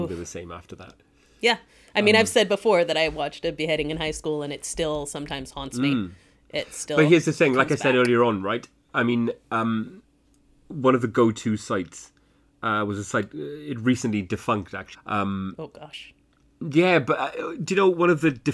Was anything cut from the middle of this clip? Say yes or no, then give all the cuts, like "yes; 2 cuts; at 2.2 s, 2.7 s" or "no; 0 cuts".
yes; 1 cut; at 14.9 s